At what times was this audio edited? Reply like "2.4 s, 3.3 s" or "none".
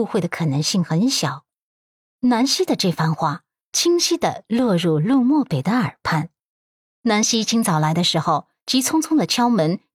none